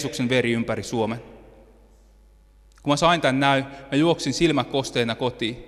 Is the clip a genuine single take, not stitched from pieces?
yes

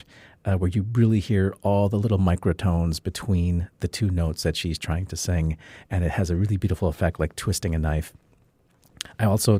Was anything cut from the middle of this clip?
no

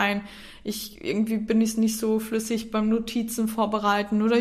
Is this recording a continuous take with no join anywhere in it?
yes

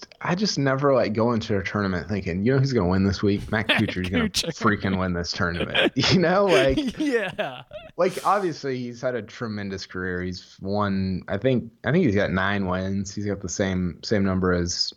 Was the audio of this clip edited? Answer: no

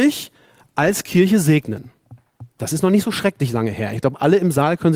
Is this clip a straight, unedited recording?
no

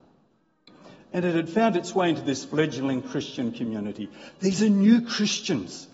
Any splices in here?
yes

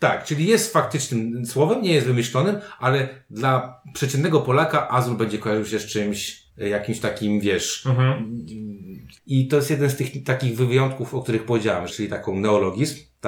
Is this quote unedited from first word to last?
no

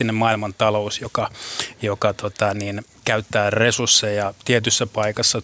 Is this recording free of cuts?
yes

